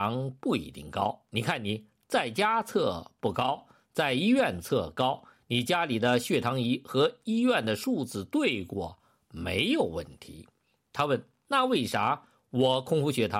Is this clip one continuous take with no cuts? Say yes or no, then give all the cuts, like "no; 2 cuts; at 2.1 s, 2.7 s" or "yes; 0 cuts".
yes; 0 cuts